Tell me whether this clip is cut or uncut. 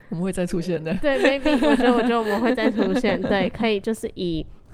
uncut